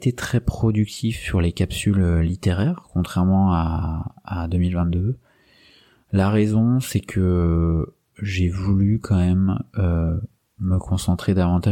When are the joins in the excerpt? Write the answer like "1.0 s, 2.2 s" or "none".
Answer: none